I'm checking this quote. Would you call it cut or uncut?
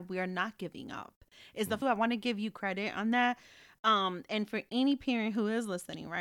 cut